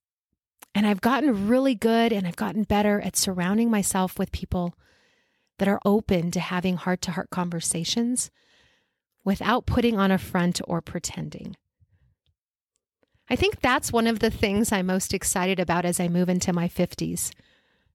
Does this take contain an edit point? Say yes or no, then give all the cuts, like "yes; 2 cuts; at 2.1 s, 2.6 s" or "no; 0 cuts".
yes; 1 cut; at 5.8 s